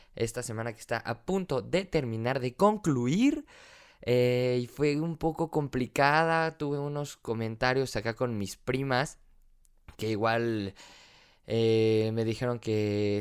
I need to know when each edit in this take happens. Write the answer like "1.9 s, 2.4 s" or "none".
none